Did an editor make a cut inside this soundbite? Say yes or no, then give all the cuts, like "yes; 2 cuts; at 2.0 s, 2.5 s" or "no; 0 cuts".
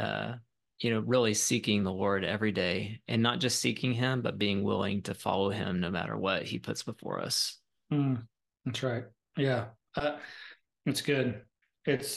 no; 0 cuts